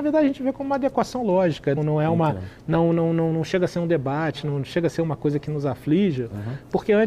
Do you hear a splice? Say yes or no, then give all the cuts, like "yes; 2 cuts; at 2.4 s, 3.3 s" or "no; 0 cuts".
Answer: yes; 1 cut; at 1.8 s